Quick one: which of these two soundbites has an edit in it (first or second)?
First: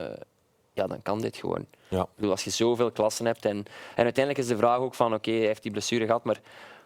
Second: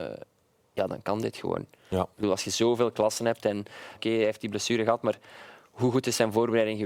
second